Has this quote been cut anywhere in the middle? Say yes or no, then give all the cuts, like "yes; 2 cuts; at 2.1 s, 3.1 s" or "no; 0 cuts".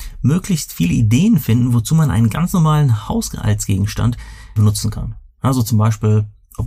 yes; 1 cut; at 4.6 s